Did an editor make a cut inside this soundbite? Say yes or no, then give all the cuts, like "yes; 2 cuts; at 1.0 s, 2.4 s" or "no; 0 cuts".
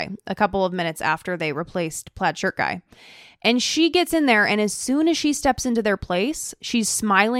no; 0 cuts